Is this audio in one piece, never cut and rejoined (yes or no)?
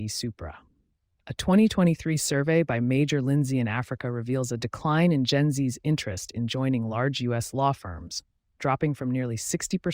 yes